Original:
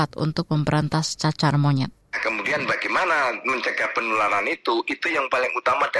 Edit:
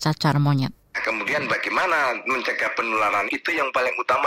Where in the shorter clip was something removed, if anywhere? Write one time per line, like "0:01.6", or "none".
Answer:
0:03.3